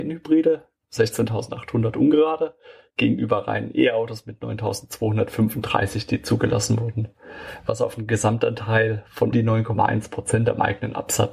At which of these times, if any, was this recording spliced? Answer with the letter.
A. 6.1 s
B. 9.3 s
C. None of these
B